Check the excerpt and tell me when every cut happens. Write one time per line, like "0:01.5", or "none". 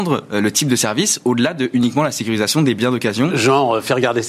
none